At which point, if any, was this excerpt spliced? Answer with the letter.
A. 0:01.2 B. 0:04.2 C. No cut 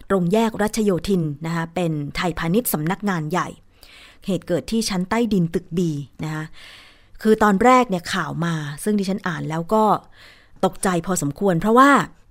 C